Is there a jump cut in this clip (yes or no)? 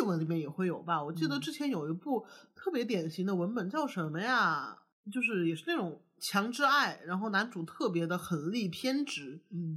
no